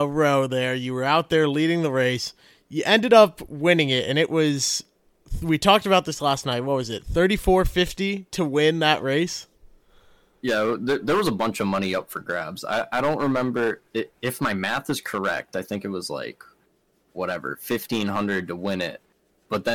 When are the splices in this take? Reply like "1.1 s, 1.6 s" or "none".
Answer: none